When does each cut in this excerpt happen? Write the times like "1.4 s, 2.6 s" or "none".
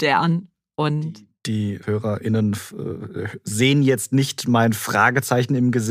none